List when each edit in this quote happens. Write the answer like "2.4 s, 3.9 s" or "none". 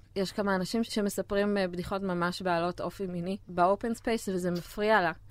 3.4 s